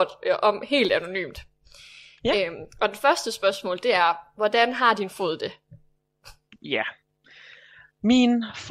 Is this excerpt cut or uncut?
uncut